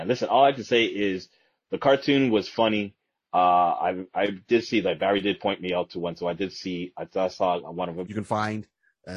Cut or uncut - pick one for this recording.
cut